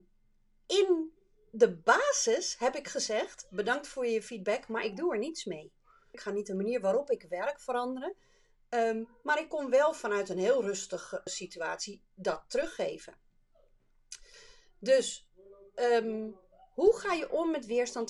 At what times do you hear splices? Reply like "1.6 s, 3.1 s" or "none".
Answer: 6.1 s, 11.3 s